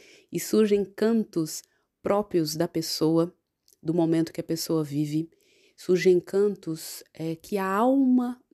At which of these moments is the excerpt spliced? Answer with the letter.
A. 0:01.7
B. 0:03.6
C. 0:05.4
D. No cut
D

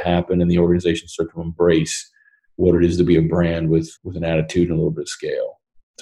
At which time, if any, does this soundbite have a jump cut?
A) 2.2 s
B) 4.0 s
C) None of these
B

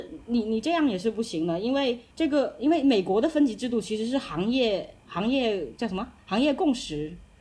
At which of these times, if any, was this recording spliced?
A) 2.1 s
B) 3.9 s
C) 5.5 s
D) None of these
A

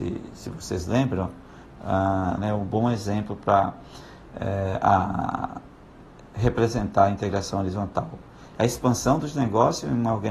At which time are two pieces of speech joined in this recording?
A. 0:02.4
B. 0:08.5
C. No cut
A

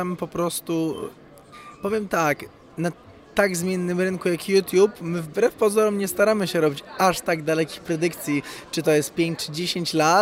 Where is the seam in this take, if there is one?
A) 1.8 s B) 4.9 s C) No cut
C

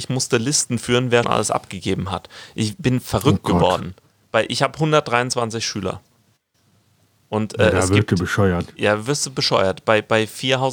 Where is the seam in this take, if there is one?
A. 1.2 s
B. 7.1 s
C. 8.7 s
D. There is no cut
A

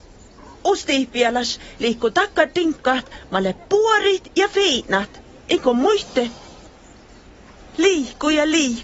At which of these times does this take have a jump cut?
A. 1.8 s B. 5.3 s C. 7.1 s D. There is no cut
A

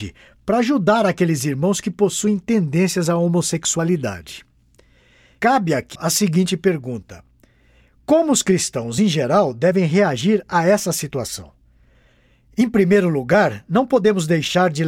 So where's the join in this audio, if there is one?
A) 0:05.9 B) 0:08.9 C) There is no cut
A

